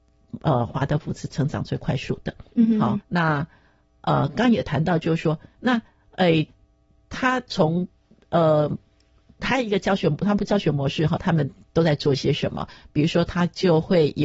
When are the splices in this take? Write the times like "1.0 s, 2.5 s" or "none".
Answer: 3.0 s, 11.2 s